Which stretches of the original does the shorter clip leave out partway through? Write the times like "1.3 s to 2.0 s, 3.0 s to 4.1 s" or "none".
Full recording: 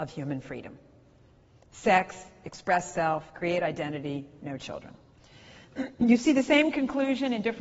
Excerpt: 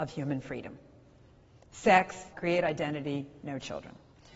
2.3 s to 3.3 s